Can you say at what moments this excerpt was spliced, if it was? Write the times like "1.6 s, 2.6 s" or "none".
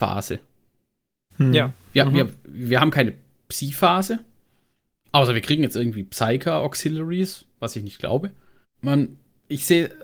8.6 s